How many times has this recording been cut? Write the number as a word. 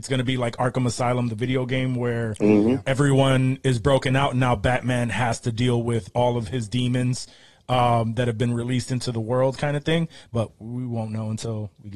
zero